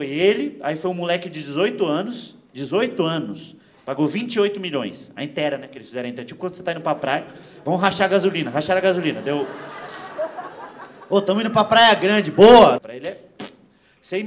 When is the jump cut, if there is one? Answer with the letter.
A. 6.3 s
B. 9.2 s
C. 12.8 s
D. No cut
C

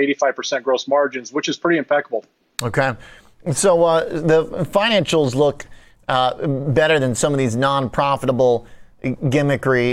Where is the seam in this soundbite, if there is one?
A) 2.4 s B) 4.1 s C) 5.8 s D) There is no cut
D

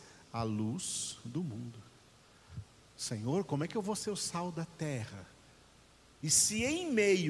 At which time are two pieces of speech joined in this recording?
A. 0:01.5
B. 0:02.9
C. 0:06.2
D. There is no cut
C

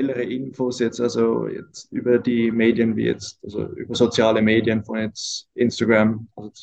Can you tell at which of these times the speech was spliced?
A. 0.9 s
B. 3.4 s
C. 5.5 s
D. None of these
D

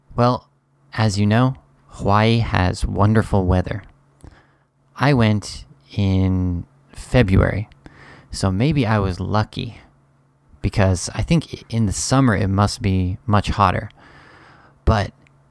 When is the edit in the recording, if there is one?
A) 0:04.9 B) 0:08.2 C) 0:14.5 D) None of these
D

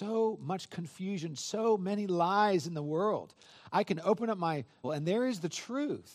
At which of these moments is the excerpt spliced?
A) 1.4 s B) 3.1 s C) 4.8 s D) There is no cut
C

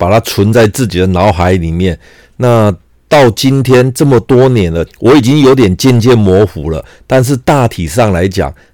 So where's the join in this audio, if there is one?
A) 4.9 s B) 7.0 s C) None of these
A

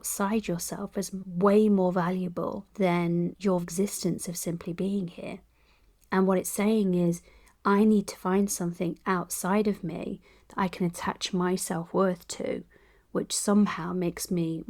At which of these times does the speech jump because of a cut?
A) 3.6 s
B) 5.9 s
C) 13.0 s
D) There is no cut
A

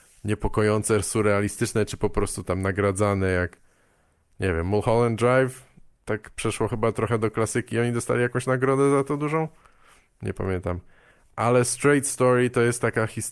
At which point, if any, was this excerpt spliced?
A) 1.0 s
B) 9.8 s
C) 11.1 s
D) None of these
D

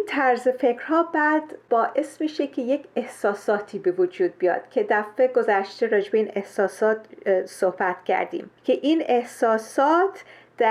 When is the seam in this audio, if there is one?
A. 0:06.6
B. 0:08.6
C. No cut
B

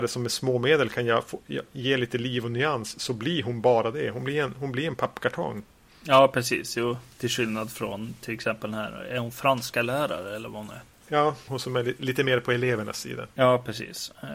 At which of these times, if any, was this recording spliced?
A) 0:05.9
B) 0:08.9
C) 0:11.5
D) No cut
C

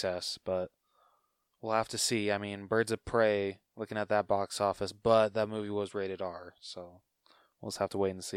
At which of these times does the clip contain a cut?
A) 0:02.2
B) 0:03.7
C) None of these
B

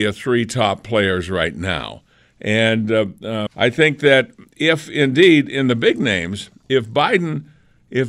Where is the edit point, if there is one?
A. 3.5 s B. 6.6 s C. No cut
A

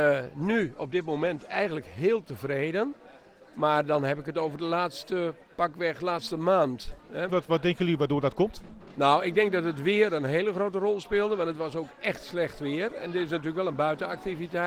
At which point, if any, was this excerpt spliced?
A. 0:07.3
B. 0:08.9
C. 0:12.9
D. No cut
A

